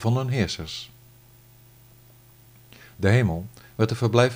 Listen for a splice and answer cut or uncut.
uncut